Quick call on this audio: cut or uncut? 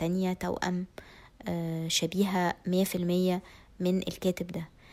uncut